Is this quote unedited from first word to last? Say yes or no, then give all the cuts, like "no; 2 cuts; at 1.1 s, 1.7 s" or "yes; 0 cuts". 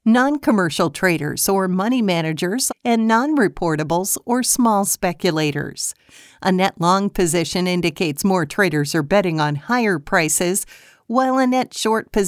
no; 1 cut; at 2.7 s